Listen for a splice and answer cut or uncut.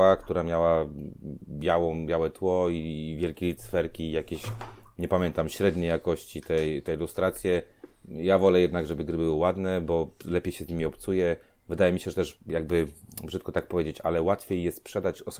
uncut